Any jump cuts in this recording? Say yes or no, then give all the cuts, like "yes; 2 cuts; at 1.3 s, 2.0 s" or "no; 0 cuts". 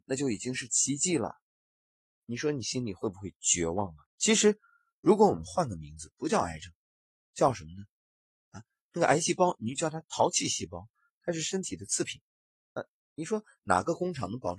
yes; 1 cut; at 4.1 s